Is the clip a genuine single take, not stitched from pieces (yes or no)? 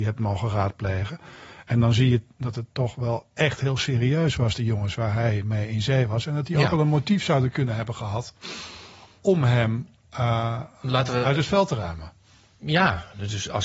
yes